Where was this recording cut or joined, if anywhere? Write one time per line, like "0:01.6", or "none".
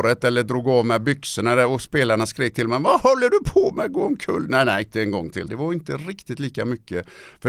0:05.5